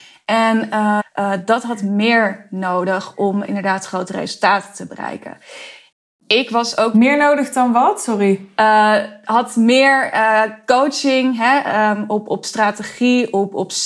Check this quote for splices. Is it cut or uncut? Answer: cut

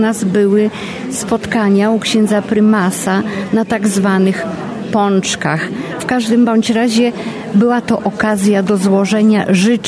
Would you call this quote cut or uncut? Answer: cut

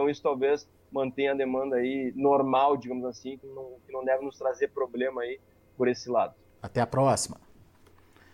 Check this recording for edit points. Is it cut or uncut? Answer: cut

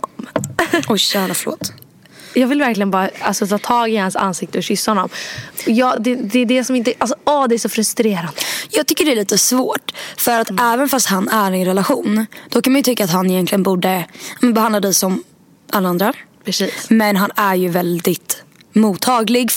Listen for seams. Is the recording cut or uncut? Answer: uncut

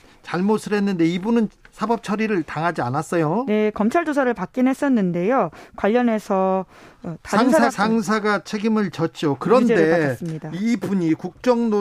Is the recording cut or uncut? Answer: cut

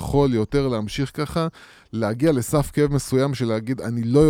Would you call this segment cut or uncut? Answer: uncut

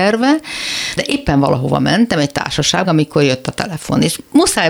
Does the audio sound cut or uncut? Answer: cut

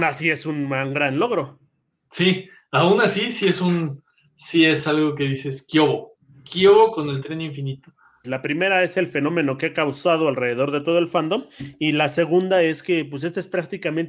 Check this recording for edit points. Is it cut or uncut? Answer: cut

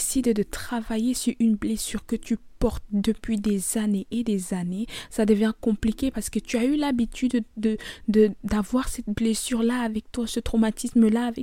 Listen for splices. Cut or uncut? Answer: uncut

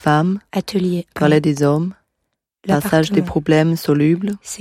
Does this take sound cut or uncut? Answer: uncut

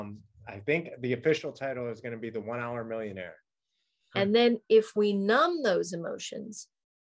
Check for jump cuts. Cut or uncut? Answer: cut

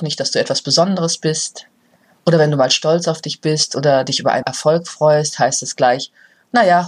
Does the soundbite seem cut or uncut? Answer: uncut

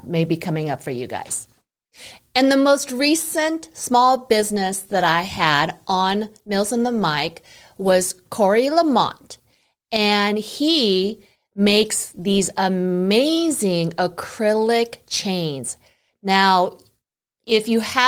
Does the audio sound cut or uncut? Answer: uncut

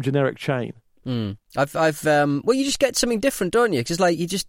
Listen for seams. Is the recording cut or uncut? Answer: cut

